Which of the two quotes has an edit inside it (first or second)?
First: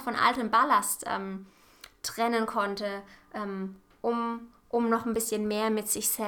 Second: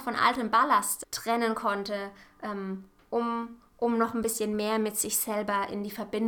second